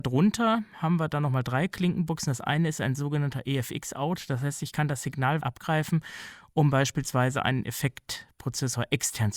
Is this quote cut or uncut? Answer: cut